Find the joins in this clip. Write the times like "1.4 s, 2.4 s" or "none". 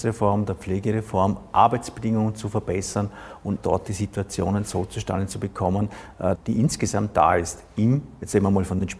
3.6 s, 6.4 s